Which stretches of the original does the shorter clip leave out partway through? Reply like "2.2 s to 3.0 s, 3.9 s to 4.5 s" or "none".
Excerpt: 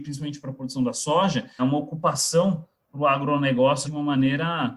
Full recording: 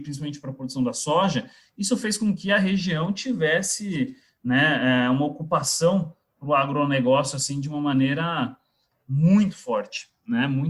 1.6 s to 5.1 s, 7.3 s to 7.6 s